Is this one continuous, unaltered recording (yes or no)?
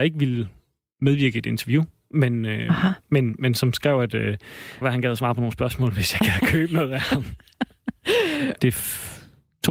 no